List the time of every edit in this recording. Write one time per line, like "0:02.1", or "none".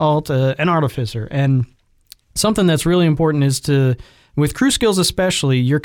none